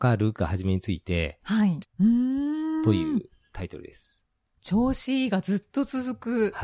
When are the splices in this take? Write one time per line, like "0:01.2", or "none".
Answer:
0:01.8